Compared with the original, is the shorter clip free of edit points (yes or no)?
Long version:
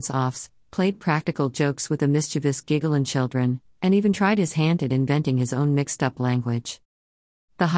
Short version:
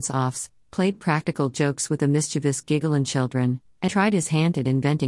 no